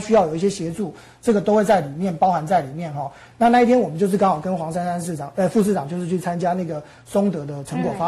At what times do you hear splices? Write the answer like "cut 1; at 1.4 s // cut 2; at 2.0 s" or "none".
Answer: none